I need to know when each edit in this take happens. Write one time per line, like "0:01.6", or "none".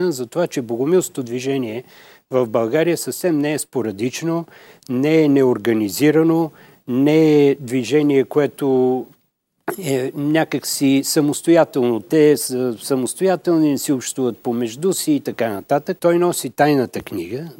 0:12.0
0:16.0